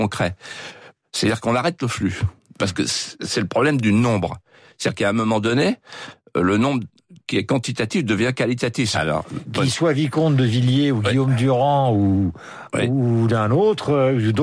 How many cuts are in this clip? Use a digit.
1